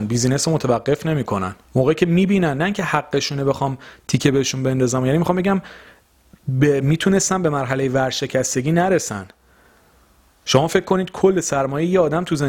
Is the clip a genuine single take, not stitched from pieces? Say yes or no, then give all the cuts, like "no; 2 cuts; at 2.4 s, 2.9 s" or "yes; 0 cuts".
no; 1 cut; at 1.6 s